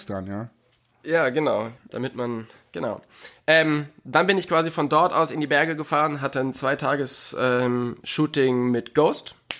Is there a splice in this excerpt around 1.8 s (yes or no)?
yes